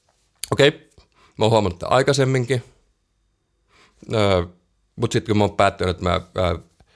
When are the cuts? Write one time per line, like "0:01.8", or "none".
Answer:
none

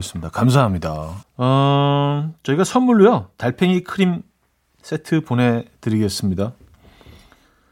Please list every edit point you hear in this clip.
0:01.2

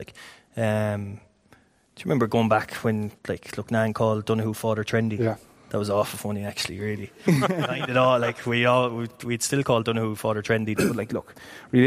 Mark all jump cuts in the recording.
0:03.2
0:10.8

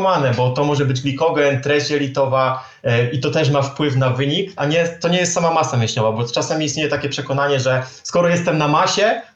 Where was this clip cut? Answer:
0:04.6

